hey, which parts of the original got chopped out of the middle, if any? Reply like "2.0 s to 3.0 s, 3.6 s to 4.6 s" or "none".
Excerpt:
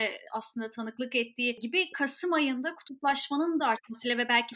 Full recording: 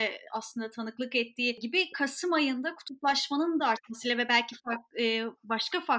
none